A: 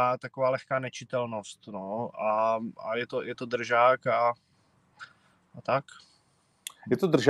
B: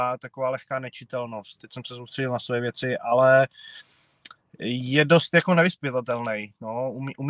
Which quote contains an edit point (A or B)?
B